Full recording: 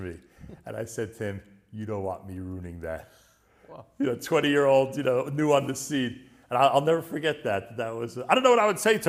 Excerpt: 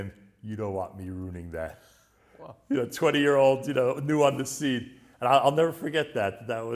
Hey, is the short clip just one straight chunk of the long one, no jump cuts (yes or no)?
yes